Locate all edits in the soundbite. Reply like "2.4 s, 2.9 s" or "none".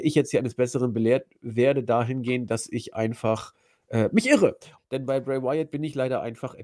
4.8 s